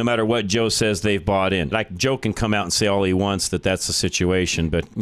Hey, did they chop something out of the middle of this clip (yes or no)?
yes